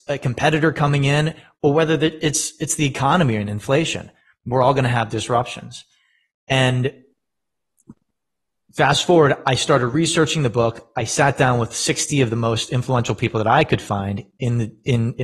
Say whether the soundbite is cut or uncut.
uncut